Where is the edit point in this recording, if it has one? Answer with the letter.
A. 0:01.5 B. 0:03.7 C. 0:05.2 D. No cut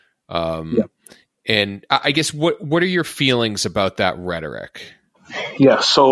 D